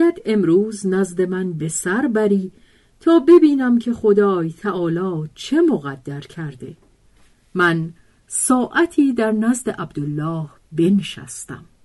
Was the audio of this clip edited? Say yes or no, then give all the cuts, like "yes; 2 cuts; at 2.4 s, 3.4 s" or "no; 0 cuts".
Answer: no; 0 cuts